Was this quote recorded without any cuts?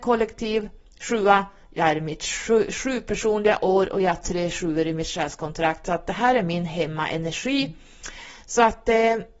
yes; 0 cuts

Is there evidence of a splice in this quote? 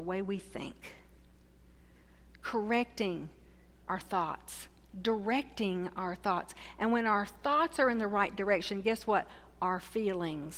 no; 0 cuts

